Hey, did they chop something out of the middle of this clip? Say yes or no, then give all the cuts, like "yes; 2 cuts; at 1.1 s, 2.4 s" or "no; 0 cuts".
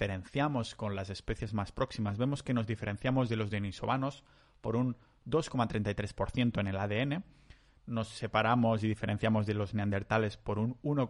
no; 0 cuts